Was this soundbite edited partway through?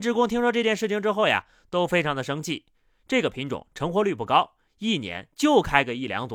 no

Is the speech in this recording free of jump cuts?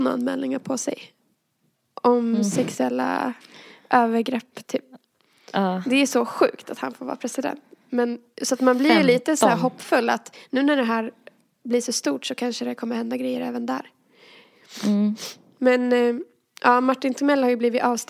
yes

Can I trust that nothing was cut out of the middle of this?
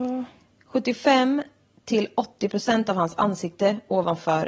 yes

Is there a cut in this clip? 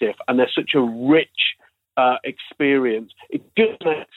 no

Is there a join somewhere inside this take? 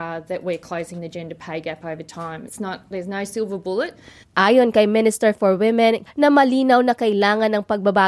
yes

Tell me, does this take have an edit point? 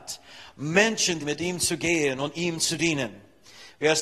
yes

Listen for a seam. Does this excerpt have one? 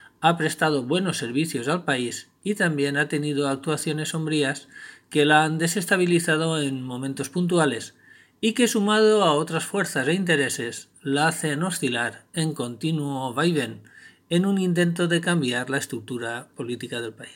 no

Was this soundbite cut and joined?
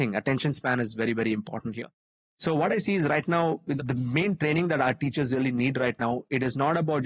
no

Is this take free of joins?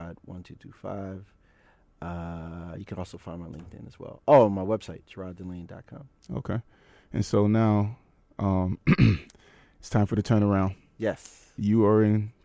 yes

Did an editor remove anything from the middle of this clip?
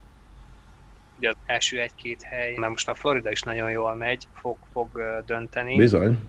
yes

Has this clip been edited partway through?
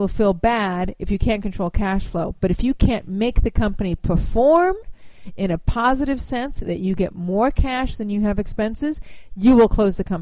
no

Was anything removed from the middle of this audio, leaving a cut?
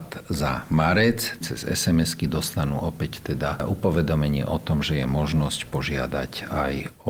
yes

